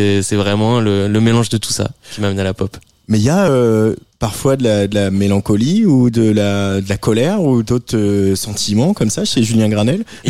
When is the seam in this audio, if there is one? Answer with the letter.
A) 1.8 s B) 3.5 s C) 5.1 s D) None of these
D